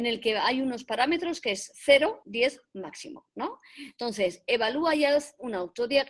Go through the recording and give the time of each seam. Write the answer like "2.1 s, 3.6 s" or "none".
2.2 s